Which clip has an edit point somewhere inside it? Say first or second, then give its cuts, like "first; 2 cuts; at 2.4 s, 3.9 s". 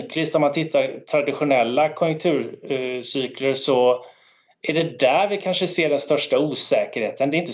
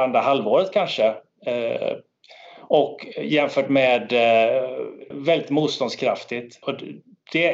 second; 2 cuts; at 5.1 s, 6.6 s